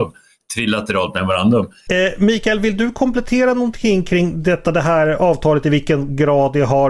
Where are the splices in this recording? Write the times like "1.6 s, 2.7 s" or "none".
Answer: 1.9 s